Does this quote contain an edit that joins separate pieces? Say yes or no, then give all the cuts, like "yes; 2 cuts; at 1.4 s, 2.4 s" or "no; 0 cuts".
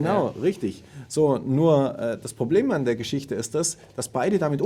no; 0 cuts